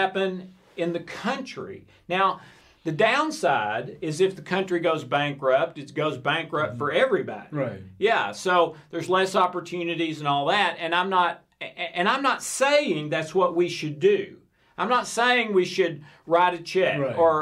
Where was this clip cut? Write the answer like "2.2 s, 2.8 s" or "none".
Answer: none